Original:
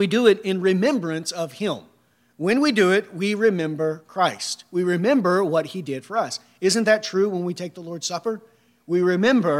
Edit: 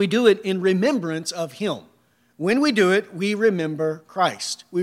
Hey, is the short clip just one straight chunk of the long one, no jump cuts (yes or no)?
yes